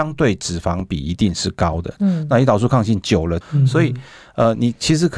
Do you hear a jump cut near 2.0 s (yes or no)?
yes